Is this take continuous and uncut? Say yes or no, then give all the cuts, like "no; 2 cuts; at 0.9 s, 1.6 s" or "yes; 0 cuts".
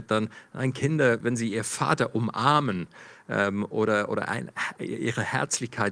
no; 1 cut; at 1.2 s